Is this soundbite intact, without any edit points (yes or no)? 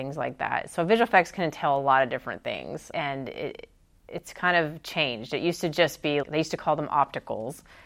no